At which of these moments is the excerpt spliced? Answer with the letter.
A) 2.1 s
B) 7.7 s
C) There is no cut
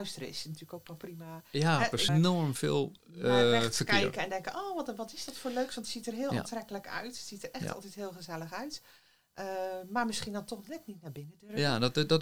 A